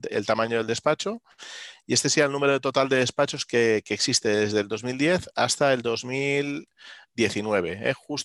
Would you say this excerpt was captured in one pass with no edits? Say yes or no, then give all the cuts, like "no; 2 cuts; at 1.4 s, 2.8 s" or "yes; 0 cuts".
yes; 0 cuts